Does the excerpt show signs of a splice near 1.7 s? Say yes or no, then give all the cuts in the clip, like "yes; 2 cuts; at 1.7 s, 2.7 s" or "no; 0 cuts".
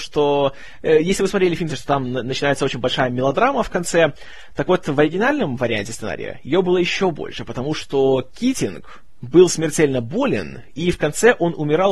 yes; 1 cut; at 1.7 s